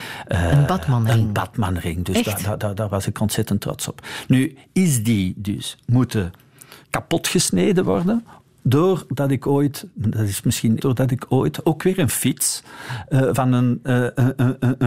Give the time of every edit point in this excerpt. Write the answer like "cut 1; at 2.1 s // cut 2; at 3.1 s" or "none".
cut 1; at 6.8 s // cut 2; at 10.8 s